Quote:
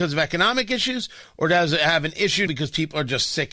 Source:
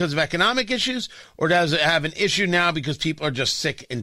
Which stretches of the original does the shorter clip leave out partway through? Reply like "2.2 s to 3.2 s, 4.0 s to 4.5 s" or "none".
2.5 s to 2.7 s